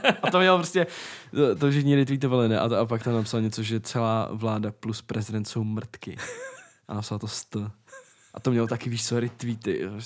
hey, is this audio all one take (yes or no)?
yes